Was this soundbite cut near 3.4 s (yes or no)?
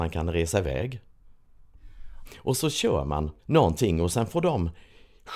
yes